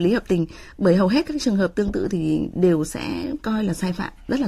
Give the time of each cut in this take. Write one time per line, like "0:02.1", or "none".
none

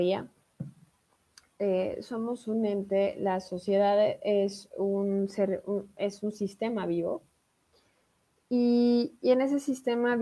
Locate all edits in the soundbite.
none

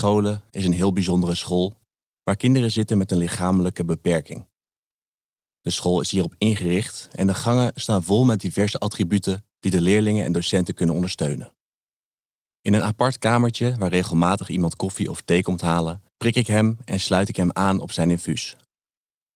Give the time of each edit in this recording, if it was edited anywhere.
0:09.5
0:12.5
0:16.1

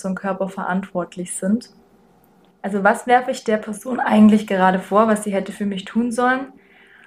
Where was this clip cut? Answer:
0:02.5

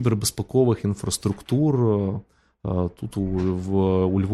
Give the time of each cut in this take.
none

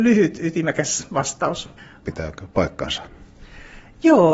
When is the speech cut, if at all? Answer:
0:02.0

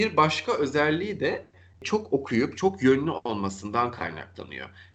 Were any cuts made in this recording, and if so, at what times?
0:02.6

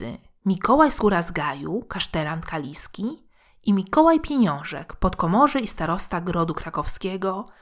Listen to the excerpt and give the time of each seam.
none

